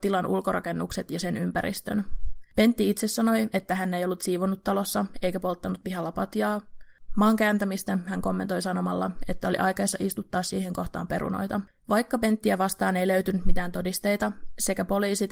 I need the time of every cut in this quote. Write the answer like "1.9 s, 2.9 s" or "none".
11.7 s